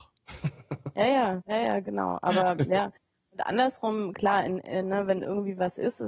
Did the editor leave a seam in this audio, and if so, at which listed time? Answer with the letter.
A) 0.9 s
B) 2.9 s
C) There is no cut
C